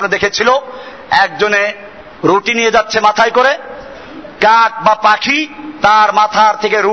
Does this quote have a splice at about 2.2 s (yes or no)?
yes